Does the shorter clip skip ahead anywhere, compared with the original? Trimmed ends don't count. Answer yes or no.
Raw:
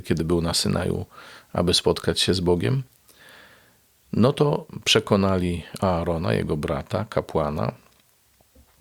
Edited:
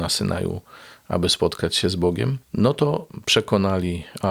yes